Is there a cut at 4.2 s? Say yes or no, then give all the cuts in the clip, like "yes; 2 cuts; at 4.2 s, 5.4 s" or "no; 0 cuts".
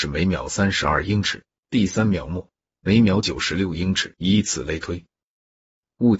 yes; 2 cuts; at 1.6 s, 4.2 s